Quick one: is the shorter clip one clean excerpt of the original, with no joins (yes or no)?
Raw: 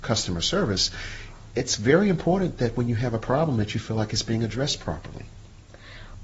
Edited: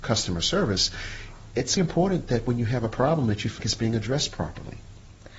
no